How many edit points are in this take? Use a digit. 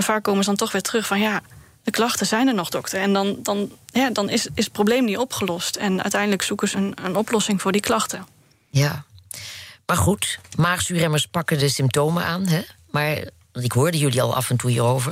1